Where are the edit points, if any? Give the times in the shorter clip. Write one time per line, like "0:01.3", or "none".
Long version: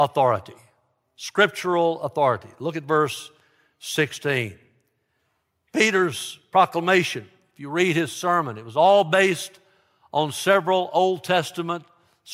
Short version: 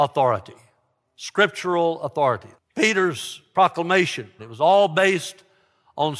0:02.5
0:04.4